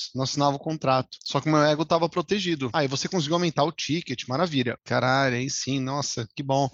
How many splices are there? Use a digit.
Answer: 2